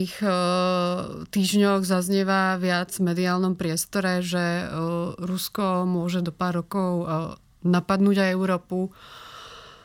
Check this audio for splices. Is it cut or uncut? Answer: uncut